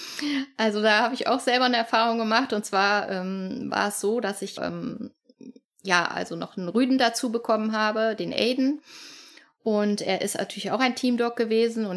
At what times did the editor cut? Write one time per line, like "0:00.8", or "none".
0:04.6